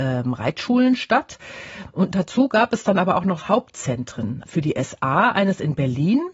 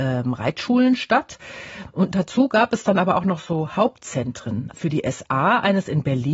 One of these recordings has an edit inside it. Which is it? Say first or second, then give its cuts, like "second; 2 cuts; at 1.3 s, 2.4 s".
first; 1 cut; at 3.4 s